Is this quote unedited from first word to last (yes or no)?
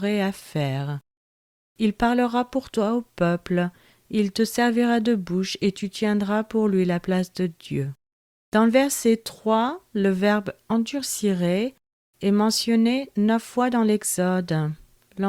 yes